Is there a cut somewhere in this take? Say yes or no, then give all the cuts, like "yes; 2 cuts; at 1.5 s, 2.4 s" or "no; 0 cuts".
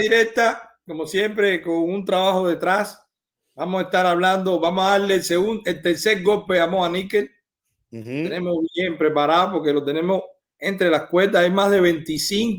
no; 0 cuts